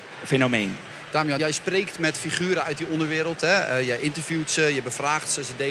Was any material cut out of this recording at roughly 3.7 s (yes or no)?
no